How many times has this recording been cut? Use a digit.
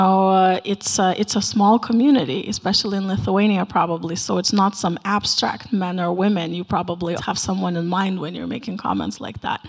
1